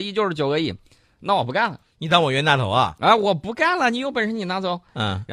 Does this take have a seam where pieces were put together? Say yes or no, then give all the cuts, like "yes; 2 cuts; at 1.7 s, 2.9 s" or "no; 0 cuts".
no; 0 cuts